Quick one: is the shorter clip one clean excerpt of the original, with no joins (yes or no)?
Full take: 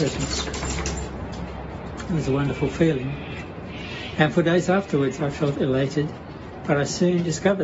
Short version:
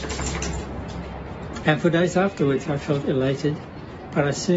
no